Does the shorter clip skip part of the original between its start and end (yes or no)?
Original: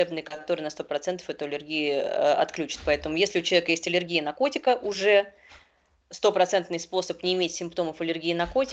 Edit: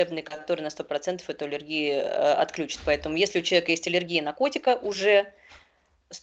no